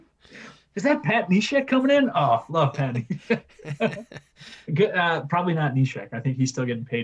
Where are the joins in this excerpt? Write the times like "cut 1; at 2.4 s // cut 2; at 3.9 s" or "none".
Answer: none